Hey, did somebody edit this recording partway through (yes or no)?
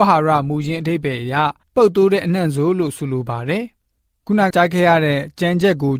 yes